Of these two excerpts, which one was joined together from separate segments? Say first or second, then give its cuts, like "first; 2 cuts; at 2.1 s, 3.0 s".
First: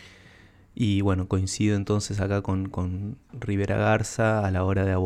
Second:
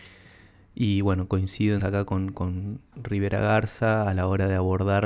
second; 1 cut; at 1.8 s